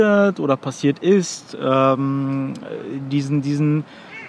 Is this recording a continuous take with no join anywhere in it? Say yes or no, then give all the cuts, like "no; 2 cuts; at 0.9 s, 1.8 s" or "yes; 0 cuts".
yes; 0 cuts